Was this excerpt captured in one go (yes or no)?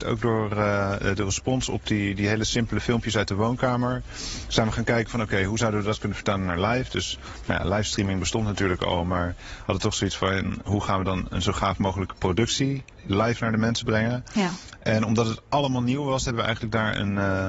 yes